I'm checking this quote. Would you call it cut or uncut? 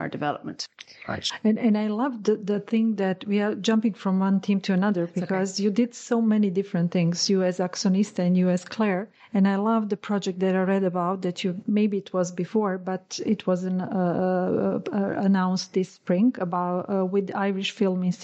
uncut